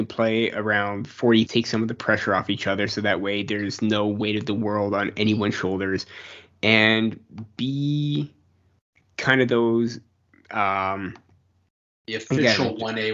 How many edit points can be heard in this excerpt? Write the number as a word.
one